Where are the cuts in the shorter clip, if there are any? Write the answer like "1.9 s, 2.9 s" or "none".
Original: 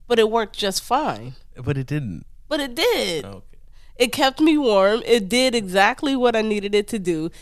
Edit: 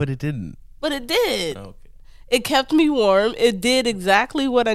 none